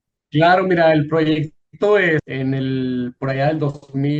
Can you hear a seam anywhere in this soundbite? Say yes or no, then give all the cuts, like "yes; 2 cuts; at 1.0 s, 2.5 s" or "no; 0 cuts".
yes; 1 cut; at 2.2 s